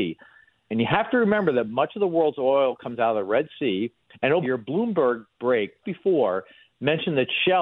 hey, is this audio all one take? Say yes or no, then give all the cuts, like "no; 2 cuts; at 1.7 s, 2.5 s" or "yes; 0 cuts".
no; 2 cuts; at 4.4 s, 5.8 s